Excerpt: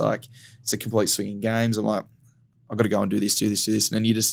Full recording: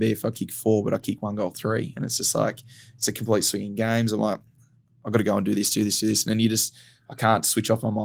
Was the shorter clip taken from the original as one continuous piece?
yes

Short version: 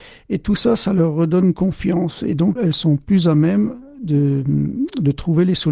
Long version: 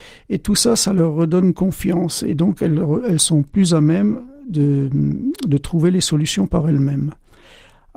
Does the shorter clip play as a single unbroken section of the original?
no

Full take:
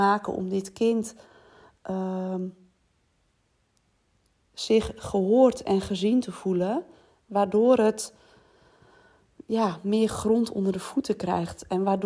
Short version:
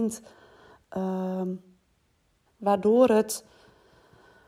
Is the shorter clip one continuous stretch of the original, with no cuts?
no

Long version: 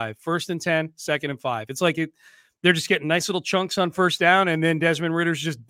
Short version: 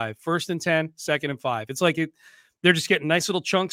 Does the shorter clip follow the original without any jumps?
yes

